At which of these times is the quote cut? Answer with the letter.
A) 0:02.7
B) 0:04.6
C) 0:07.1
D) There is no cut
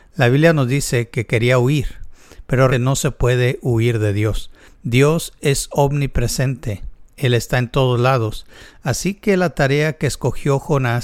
A